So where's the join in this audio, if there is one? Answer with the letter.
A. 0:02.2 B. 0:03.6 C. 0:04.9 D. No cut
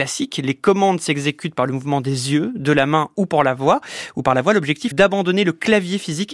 C